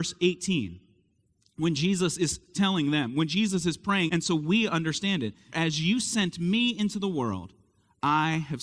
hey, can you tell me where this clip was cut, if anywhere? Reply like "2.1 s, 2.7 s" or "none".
4.1 s, 5.5 s